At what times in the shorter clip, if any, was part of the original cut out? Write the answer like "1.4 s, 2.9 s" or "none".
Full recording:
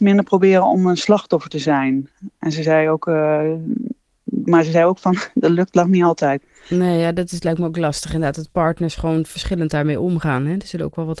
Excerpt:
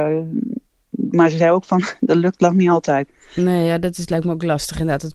none